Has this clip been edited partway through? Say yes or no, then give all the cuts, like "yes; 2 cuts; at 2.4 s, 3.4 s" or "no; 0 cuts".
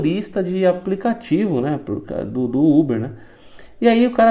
no; 0 cuts